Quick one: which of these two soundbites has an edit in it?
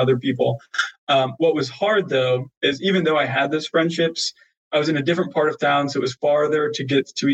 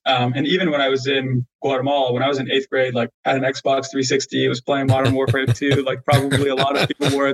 second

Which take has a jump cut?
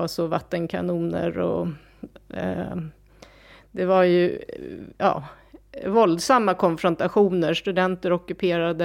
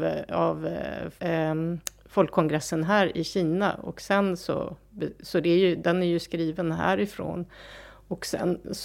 second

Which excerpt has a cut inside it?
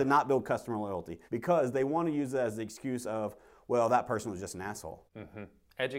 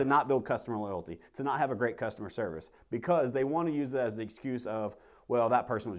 first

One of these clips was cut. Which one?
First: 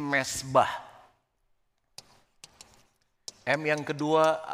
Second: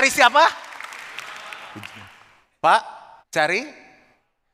second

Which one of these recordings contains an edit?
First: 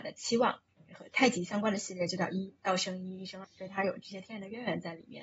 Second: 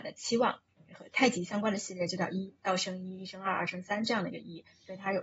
first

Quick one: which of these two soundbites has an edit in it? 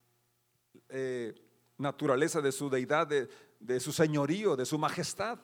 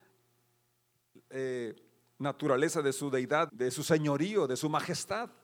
second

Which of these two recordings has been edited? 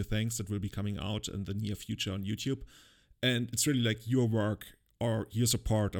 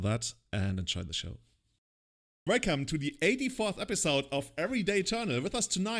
second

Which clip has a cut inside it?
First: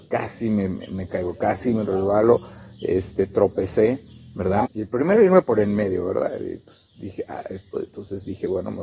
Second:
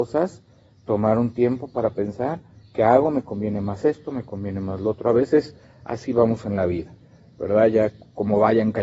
first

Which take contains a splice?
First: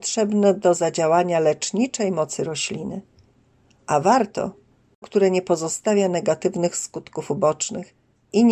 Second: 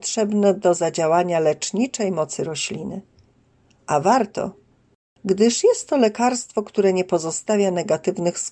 first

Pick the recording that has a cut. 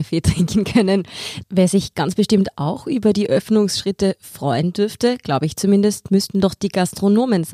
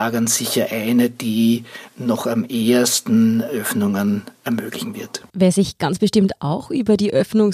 second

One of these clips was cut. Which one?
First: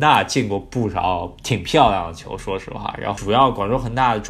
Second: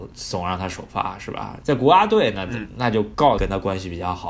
second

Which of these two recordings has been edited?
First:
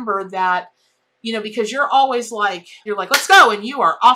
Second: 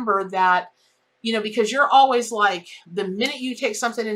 first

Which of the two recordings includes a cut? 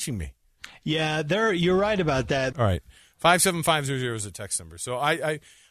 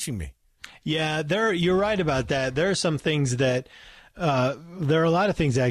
first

